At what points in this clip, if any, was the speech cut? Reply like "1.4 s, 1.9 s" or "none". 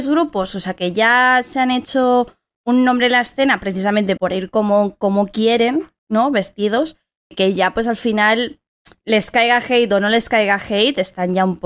4.2 s